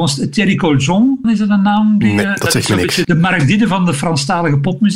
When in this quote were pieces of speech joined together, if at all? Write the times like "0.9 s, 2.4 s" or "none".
1.2 s, 3.0 s